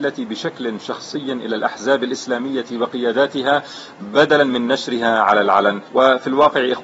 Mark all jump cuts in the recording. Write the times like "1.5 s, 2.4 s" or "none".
5.9 s